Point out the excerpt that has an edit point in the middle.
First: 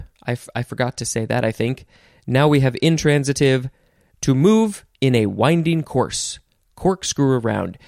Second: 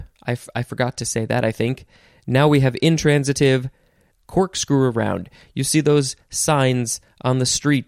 second; 1 cut; at 4.1 s

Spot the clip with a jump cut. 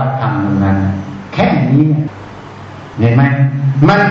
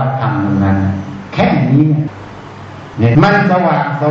second; 1 cut; at 3.1 s

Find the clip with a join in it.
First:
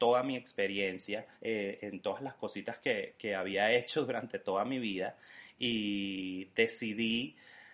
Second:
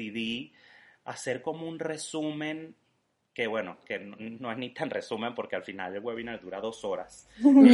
first; 1 cut; at 1.3 s

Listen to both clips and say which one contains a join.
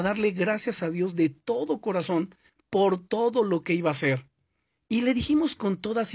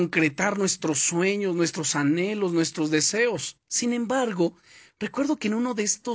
second; 1 cut; at 3.6 s

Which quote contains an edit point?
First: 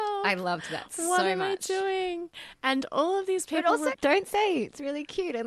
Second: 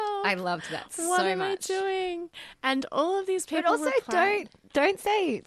first; 1 cut; at 3.9 s

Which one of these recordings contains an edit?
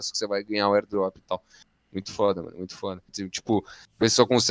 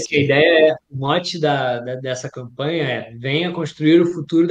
first; 1 cut; at 3.1 s

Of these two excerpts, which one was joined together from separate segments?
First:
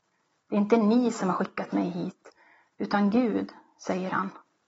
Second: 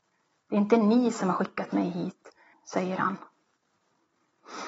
second; 1 cut; at 2.5 s

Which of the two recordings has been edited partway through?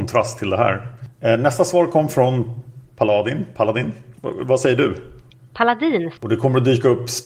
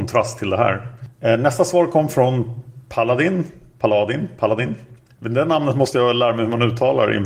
first; 3 cuts; at 2.8 s, 4.2 s, 6.2 s

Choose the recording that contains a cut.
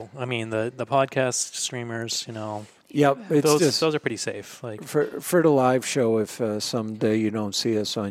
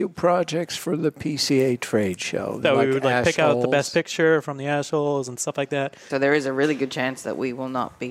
second; 2 cuts; at 2.6 s, 6.1 s

